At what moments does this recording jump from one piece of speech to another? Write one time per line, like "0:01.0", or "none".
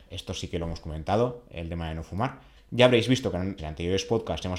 0:02.6
0:03.6